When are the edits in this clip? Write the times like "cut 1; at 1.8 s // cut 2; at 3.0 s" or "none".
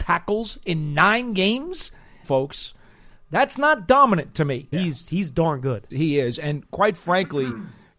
cut 1; at 2.2 s // cut 2; at 4.7 s // cut 3; at 5.9 s